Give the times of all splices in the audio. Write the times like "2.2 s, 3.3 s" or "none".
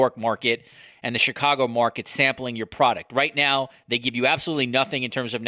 none

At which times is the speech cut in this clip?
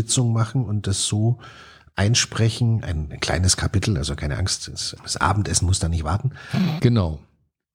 5.0 s, 6.8 s

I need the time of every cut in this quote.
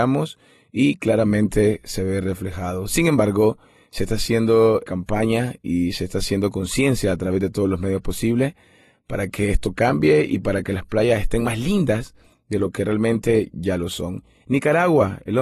4.9 s

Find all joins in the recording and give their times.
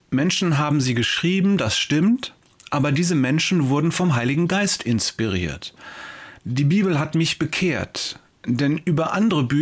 6.4 s

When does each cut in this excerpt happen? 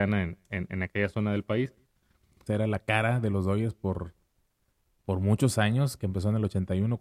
2.5 s, 6.0 s

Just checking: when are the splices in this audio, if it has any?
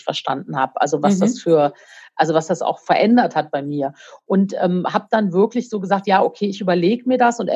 none

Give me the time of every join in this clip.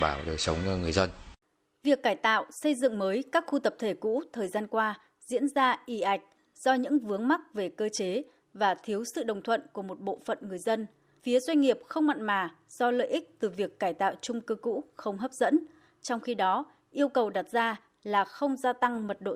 11.2 s

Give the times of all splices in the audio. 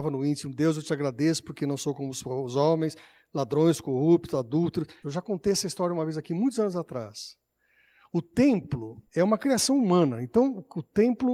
5.0 s, 9.1 s

